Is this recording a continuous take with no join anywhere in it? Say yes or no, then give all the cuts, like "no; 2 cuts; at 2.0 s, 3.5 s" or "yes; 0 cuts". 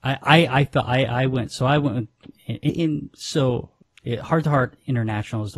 no; 1 cut; at 2.7 s